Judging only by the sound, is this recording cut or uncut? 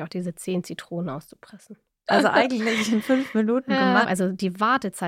cut